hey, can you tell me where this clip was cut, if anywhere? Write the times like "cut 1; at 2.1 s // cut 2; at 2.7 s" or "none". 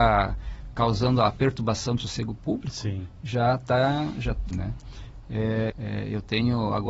cut 1; at 4.5 s // cut 2; at 5.7 s